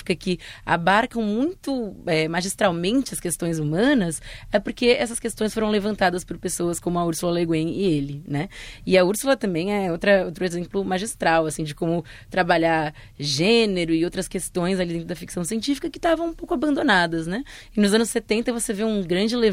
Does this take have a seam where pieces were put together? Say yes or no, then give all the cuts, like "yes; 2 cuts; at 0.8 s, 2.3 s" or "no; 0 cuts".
no; 0 cuts